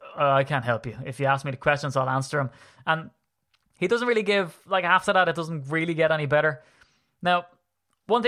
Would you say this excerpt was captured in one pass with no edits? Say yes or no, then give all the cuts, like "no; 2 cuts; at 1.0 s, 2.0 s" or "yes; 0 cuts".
yes; 0 cuts